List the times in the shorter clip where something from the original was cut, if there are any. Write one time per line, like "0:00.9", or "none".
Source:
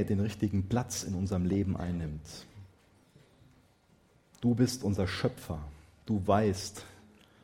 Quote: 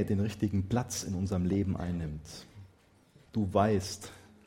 0:03.3